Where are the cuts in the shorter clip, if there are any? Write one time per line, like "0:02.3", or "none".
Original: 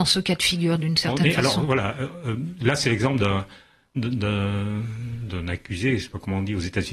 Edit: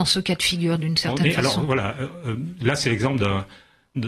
none

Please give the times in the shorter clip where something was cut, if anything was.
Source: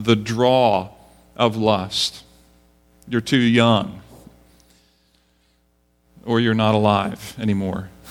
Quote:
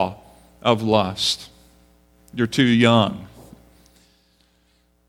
none

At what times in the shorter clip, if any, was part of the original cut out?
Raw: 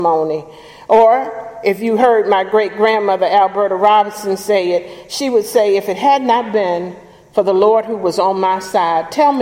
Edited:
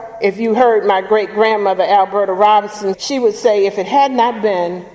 0:02.9

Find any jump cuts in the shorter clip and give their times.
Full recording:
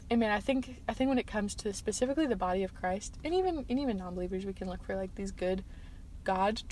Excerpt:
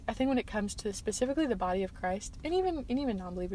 none

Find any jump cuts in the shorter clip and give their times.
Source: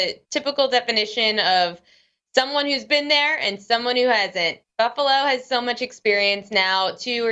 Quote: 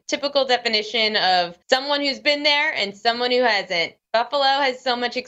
0:01.6

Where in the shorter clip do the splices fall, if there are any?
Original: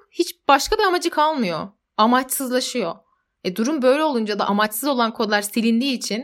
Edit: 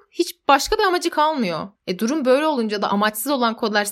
0:01.8

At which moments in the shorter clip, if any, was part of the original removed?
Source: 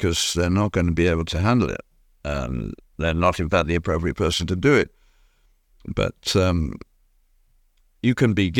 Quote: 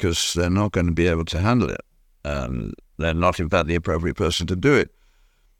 none

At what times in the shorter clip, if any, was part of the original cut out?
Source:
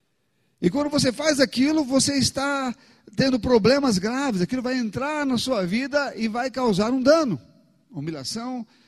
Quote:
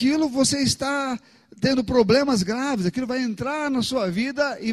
none

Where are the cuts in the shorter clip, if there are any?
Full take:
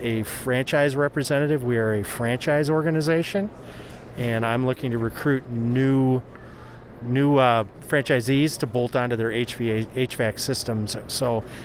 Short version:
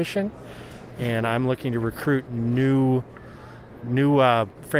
none

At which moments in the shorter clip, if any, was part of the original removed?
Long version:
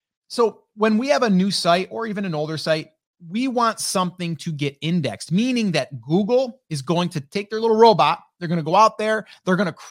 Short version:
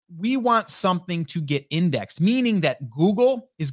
none

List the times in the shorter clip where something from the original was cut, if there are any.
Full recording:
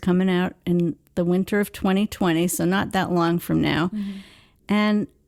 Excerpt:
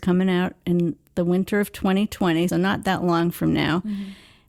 0:02.5

